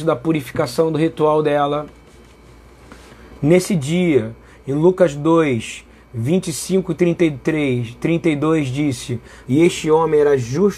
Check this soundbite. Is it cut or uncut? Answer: cut